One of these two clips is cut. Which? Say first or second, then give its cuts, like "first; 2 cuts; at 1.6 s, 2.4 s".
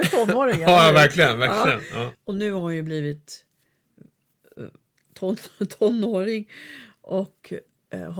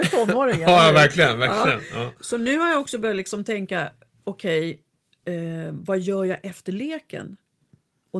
first; 1 cut; at 2.1 s